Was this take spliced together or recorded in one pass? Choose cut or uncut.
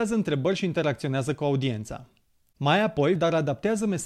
cut